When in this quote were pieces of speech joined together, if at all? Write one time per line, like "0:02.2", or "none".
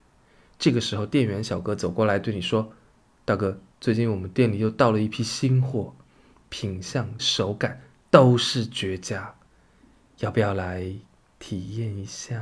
0:03.7
0:07.2